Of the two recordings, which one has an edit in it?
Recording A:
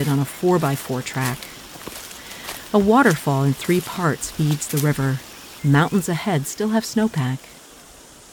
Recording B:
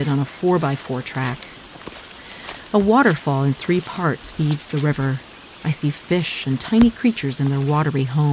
A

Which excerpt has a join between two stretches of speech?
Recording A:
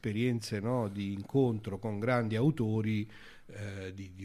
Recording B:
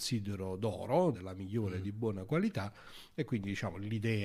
B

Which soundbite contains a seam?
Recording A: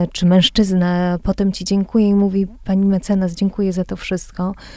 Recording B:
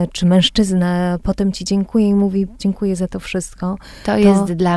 B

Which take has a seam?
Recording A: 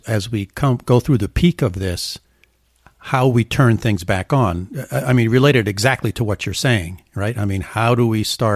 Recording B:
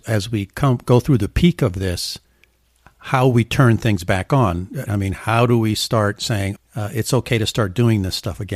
B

